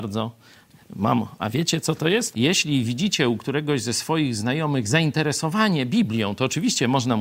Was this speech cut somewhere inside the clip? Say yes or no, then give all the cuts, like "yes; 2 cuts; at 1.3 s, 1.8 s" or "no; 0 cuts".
yes; 1 cut; at 2.3 s